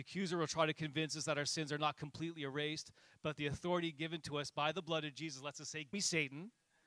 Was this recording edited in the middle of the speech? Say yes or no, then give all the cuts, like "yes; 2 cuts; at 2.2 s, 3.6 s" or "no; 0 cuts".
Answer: yes; 1 cut; at 5.9 s